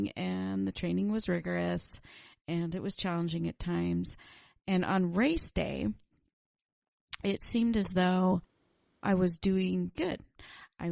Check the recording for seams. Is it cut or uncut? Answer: cut